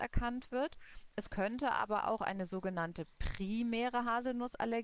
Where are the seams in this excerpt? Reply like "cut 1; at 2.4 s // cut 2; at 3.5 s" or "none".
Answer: none